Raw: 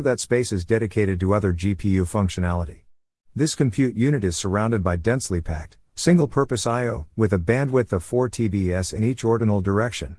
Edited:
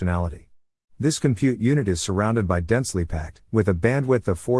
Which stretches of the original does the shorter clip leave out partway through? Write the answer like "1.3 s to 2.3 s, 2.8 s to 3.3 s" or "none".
5.8 s to 7.1 s